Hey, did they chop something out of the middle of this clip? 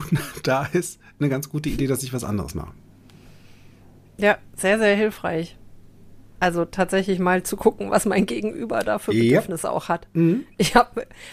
no; 0 cuts

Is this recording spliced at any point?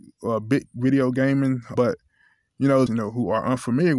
yes; 2 cuts; at 1.8 s, 2.9 s

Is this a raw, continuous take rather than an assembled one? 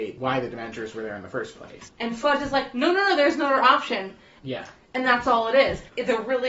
no; 2 cuts; at 1.9 s, 4.4 s

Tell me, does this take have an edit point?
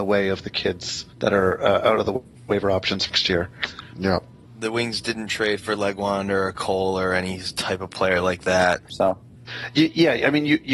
yes; 2 cuts; at 3.9 s, 8.9 s

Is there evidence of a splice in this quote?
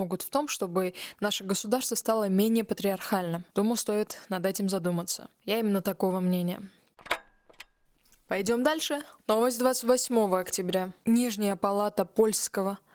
no; 0 cuts

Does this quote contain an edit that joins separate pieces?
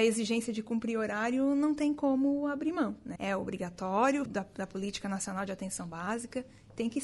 yes; 2 cuts; at 3.2 s, 4.2 s

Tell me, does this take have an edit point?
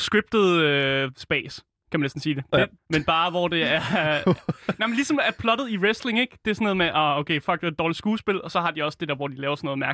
yes; 1 cut; at 2.8 s

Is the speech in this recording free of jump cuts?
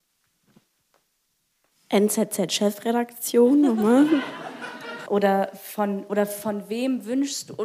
no; 2 cuts; at 1.7 s, 5.1 s

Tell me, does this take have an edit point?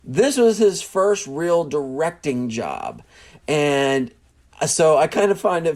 no; 0 cuts

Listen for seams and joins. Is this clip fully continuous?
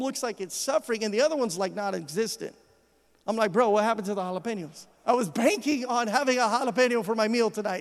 no; 1 cut; at 5.0 s

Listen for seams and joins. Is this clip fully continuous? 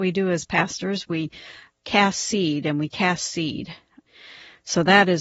yes; 0 cuts

